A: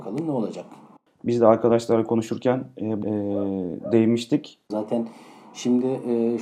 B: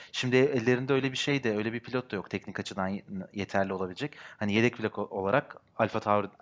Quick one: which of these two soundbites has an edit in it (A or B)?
A